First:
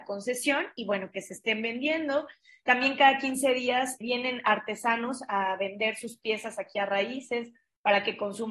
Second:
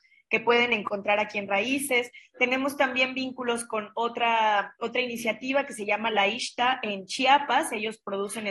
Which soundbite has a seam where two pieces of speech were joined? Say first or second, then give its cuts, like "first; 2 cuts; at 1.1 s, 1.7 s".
first; 1 cut; at 4.0 s